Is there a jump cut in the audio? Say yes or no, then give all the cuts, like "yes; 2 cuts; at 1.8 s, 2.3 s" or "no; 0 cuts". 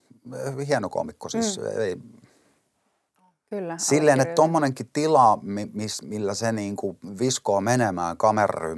no; 0 cuts